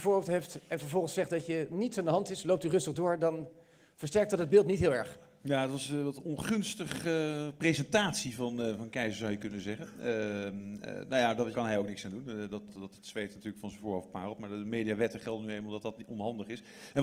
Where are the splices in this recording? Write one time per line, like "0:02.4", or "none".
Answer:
0:11.5
0:12.7